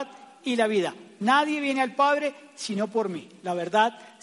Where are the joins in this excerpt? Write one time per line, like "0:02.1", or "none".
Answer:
none